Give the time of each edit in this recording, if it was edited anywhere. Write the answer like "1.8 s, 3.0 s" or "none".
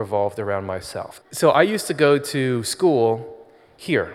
1.2 s